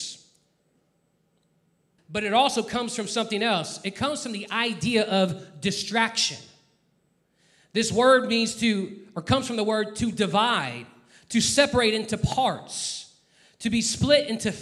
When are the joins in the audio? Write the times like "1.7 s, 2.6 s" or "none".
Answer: 2.0 s